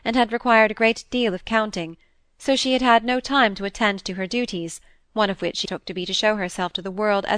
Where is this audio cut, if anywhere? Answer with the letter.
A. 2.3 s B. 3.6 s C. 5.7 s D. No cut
C